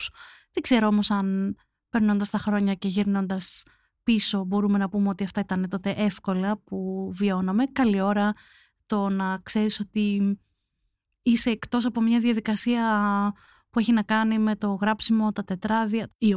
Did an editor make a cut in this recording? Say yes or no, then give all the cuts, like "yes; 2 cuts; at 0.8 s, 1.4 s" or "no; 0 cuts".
no; 0 cuts